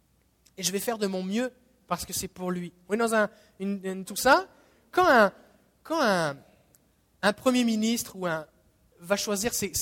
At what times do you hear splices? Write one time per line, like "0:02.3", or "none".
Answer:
0:04.1